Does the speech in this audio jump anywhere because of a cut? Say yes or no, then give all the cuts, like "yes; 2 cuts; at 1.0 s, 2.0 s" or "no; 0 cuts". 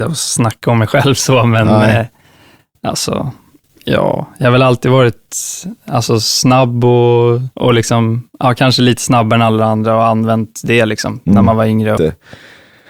yes; 2 cuts; at 7.5 s, 12.0 s